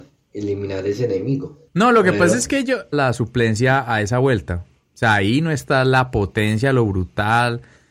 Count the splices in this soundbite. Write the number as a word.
two